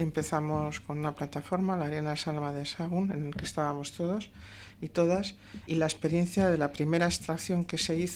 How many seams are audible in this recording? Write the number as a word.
one